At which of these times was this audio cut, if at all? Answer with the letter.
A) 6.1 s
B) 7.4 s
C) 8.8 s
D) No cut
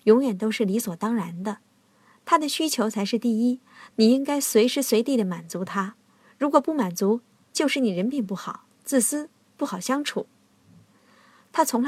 D